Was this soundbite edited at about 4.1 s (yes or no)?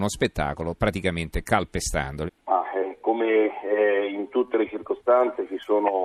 no